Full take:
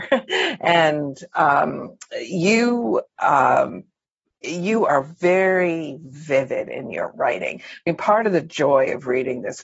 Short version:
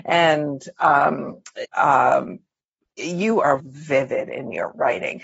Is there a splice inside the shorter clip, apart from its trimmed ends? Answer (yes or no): yes